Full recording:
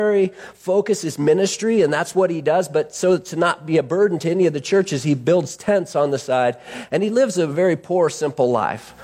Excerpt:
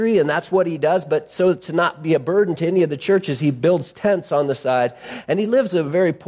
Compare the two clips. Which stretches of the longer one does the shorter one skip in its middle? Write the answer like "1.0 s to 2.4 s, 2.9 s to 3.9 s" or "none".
none